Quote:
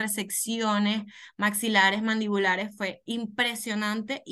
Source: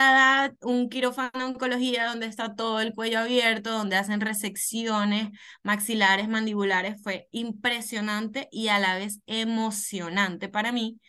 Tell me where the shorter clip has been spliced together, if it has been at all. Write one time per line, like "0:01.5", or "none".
none